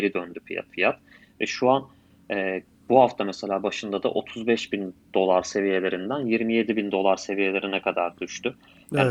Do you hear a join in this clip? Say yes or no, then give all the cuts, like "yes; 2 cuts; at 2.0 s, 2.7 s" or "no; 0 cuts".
no; 0 cuts